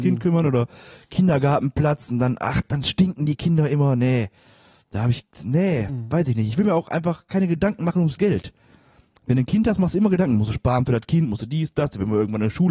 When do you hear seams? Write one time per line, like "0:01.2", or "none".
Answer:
none